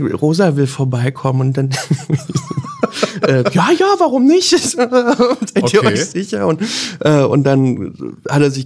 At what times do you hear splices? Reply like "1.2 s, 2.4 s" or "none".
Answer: none